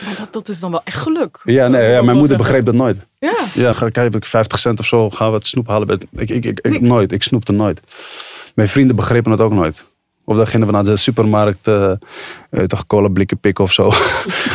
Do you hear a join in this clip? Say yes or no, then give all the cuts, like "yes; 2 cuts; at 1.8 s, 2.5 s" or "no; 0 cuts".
yes; 1 cut; at 3.7 s